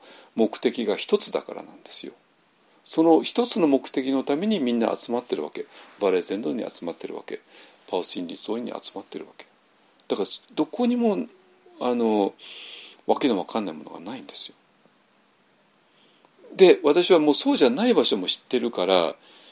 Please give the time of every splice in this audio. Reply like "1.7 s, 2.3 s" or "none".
none